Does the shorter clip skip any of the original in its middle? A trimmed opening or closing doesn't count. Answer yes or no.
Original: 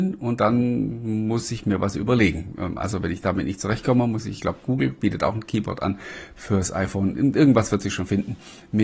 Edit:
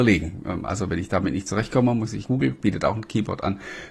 yes